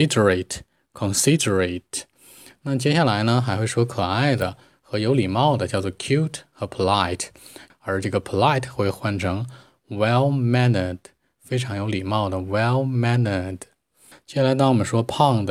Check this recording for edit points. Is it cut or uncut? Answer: cut